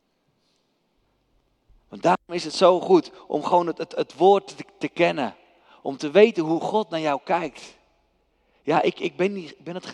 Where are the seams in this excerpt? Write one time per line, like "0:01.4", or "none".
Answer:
none

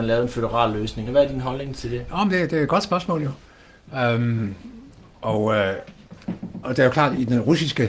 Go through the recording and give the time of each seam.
0:01.1
0:06.6

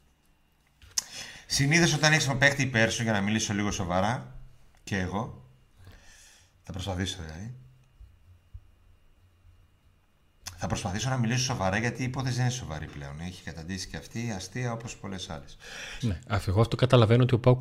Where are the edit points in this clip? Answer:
0:16.0

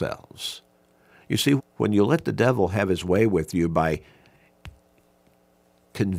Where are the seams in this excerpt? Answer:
0:01.6

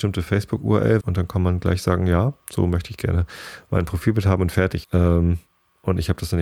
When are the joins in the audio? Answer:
0:01.0
0:04.8

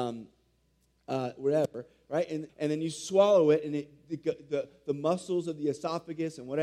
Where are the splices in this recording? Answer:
0:02.5

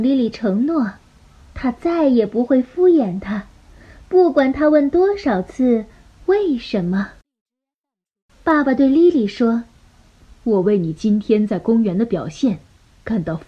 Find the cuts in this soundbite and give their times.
none

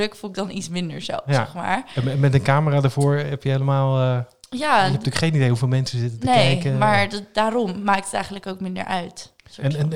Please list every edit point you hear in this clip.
none

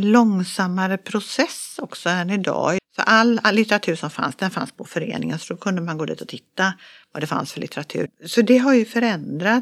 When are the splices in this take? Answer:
0:02.8
0:08.1

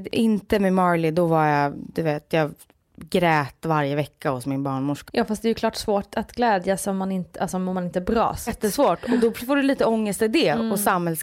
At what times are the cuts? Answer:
0:05.1
0:08.5

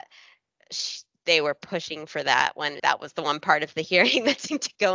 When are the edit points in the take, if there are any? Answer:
0:02.8

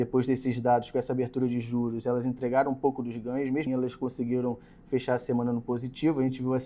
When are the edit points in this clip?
0:03.7

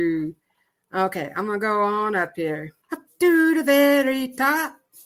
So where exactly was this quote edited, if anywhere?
0:02.8

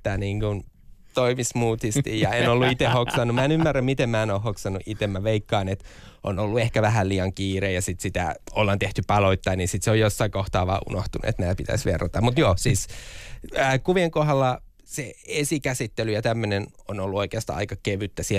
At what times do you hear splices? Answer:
none

